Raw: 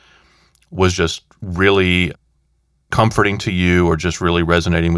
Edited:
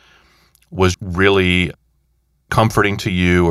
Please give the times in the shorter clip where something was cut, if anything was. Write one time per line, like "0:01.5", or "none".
0:00.9